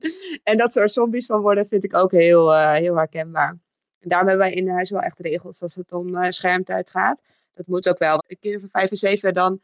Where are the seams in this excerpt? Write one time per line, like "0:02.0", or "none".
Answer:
0:08.2